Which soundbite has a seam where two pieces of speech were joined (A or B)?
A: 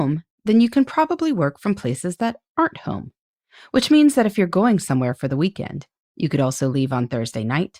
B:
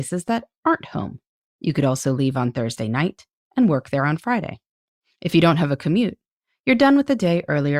B